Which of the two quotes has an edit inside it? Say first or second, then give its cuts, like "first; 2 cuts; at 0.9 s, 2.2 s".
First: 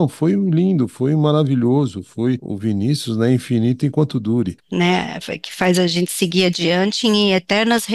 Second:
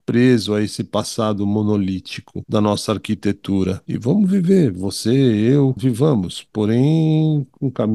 first; 2 cuts; at 2.4 s, 4.6 s